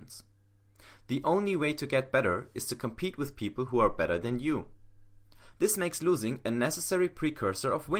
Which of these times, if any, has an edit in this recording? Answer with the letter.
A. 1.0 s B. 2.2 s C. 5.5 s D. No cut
C